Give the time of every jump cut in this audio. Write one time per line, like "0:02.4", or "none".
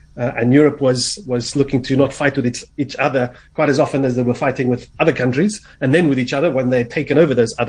none